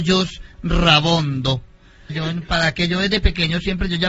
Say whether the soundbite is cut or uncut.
cut